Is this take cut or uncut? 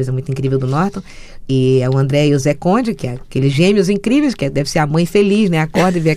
uncut